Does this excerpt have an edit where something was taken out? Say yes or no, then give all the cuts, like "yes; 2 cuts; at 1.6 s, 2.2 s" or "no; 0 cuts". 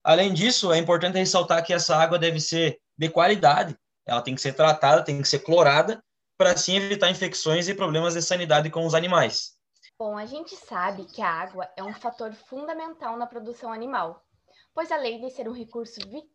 yes; 1 cut; at 9.9 s